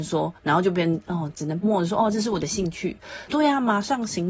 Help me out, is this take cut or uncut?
cut